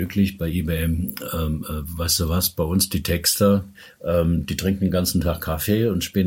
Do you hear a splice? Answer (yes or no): no